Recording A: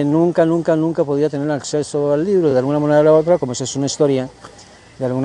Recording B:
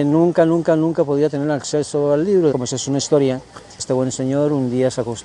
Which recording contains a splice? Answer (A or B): B